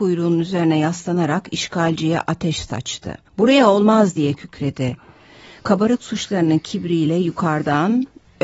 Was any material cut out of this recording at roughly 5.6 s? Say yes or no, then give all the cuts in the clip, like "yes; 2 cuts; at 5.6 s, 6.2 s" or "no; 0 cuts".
no; 1 cut; at 3.3 s